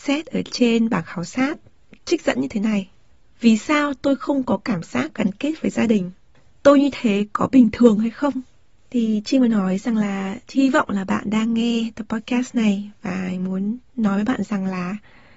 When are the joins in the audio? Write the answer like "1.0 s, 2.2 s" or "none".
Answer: none